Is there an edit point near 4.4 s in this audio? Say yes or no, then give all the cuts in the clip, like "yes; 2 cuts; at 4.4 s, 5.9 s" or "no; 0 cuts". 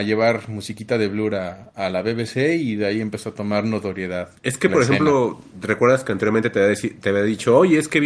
yes; 1 cut; at 4.4 s